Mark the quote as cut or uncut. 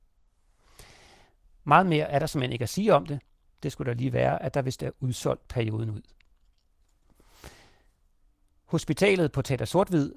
uncut